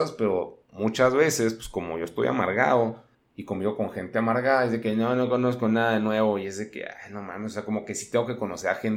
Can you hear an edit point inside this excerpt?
no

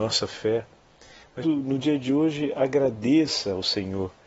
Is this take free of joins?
no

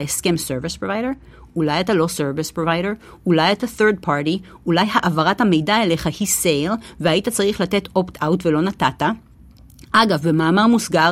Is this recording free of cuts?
yes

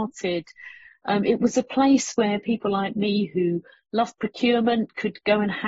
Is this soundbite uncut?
yes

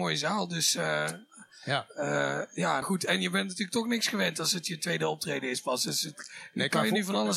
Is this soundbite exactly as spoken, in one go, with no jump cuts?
no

